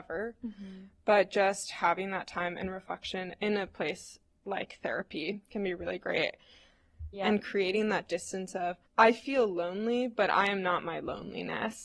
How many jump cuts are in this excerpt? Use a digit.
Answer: 2